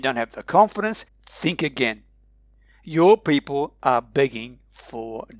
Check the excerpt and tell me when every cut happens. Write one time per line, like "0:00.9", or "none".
0:01.0